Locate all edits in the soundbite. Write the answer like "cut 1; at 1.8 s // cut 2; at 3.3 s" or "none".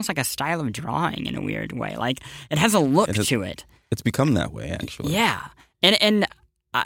none